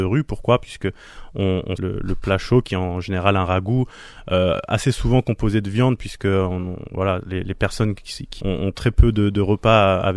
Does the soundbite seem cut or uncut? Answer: cut